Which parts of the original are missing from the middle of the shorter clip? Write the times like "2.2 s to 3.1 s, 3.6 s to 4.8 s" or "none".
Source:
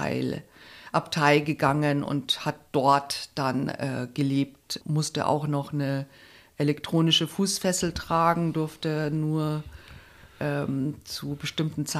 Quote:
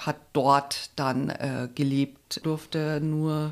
4.8 s to 8.5 s